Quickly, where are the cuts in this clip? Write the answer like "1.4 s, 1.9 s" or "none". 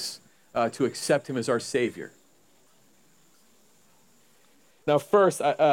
4.7 s